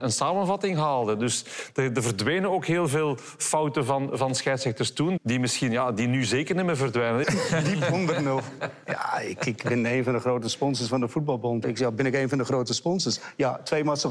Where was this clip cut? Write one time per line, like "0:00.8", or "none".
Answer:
0:05.2
0:07.2
0:11.6